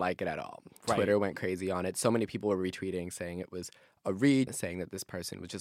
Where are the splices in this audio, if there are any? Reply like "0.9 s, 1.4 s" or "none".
4.5 s